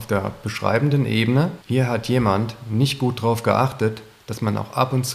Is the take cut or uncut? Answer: cut